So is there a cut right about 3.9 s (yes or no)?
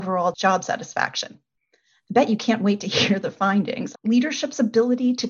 yes